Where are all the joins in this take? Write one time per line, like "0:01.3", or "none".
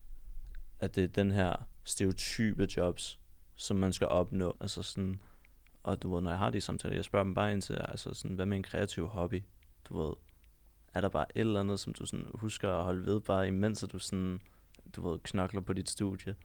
0:04.5